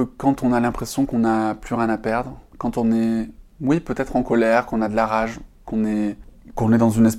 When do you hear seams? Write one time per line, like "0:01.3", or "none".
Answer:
none